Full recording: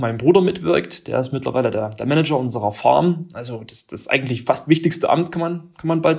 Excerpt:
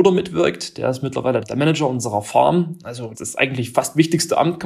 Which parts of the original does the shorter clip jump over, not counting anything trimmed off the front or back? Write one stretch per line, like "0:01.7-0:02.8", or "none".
0:01.7-0:01.9
0:03.6-0:03.9